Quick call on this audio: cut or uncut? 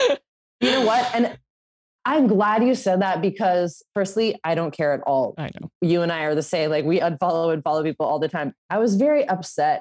cut